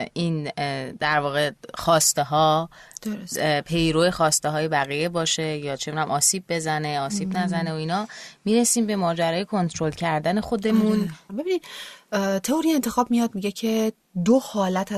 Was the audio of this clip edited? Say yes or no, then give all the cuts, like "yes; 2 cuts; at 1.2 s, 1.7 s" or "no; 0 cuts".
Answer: yes; 1 cut; at 11.3 s